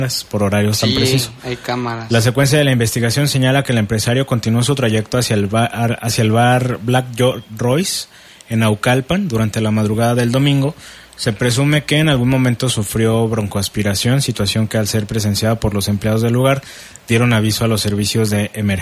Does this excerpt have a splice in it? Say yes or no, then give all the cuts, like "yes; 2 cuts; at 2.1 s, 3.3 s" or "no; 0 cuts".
no; 0 cuts